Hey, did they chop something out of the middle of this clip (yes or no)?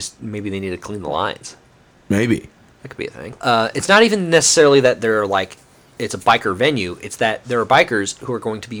yes